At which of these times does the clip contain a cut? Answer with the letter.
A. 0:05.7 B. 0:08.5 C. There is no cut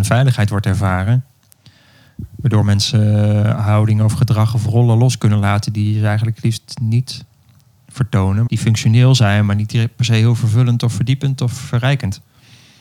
B